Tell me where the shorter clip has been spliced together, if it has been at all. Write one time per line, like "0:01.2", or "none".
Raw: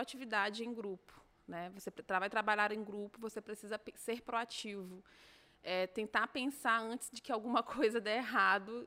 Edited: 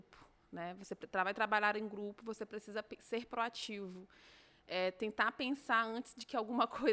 none

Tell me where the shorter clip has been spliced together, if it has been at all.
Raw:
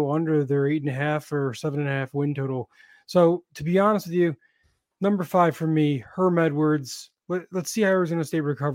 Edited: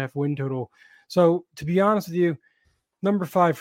none

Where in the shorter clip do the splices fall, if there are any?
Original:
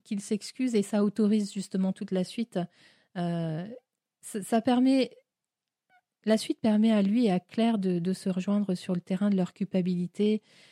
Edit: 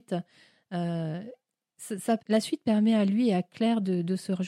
0:02.2

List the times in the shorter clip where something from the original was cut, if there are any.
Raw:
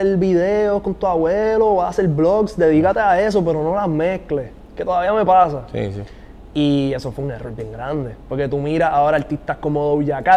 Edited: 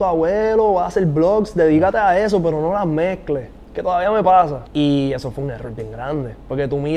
0:04.7

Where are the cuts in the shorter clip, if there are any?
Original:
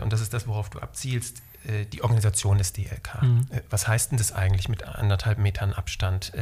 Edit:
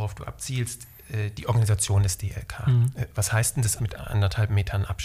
0:03.8

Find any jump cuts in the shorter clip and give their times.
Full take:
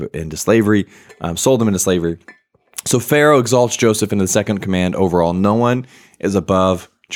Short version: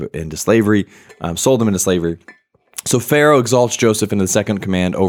none

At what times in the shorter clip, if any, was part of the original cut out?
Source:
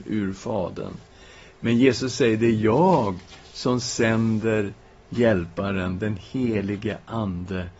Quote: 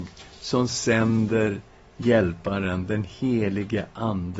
none

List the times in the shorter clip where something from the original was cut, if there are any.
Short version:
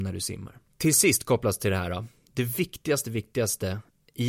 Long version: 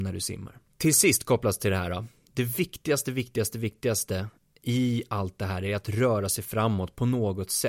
0:03.0

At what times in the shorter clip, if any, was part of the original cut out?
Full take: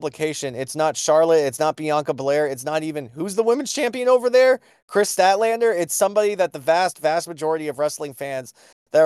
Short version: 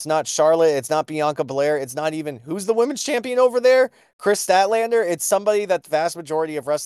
0:05.8

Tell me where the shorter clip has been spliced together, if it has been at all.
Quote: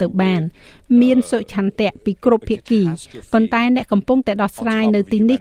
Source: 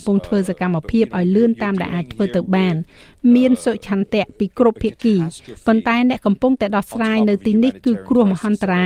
none

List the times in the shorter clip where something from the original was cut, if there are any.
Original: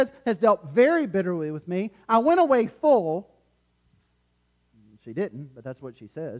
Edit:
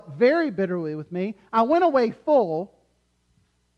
none

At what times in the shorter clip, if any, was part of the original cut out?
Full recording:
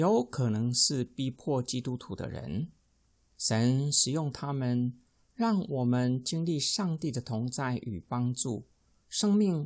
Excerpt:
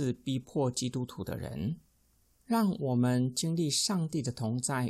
0:02.3

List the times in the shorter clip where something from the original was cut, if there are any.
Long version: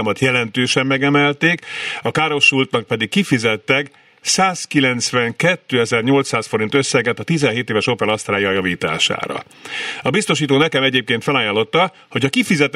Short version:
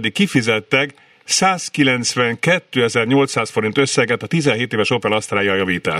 none

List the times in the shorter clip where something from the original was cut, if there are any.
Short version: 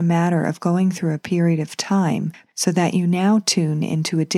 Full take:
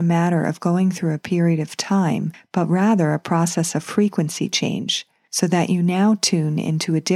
0:02.5

